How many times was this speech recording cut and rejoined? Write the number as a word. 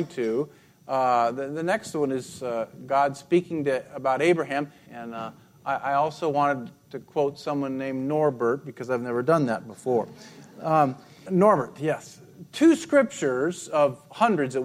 two